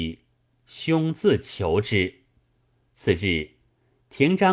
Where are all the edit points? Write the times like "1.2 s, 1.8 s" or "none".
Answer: 2.8 s